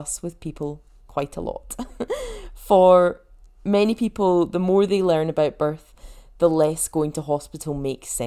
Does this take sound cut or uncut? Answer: uncut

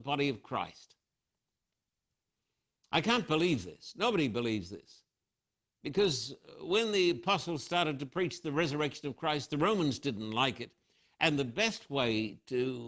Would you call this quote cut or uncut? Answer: uncut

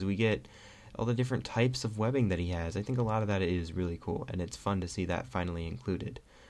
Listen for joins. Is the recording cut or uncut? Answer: uncut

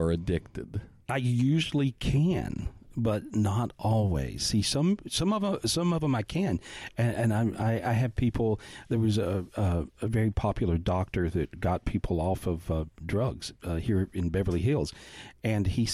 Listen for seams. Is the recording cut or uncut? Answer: uncut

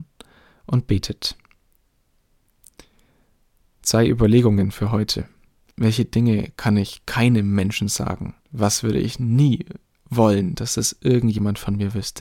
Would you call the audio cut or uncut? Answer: cut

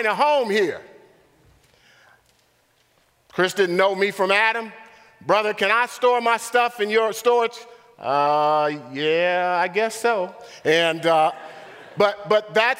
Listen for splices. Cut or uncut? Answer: uncut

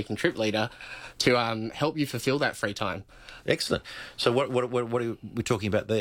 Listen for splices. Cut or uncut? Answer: cut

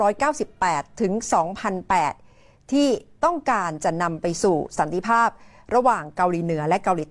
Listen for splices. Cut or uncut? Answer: uncut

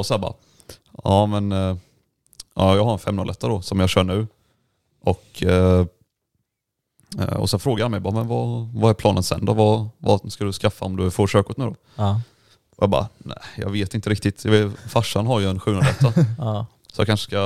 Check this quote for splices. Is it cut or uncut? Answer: uncut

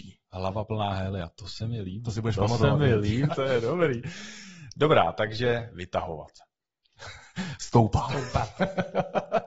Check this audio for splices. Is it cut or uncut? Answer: cut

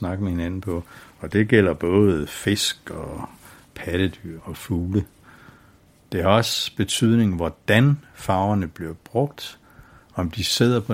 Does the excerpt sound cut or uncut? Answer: cut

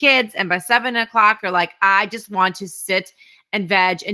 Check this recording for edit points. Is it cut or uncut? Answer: uncut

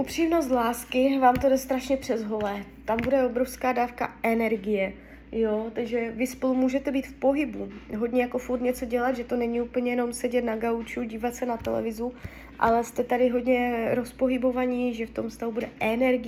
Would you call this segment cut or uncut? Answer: uncut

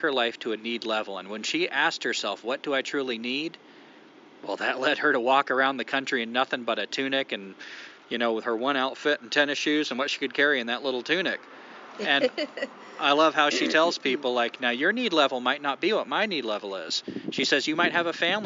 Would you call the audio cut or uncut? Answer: cut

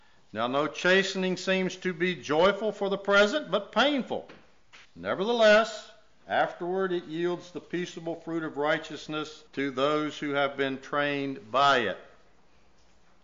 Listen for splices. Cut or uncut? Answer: cut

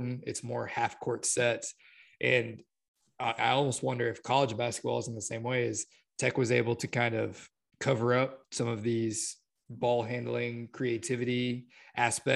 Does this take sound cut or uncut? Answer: cut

